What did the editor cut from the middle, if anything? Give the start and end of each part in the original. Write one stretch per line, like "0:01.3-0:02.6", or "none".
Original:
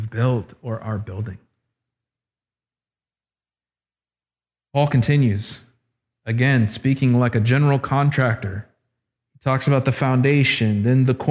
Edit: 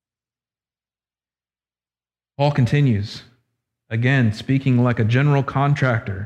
none